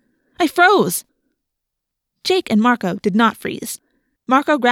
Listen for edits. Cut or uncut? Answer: uncut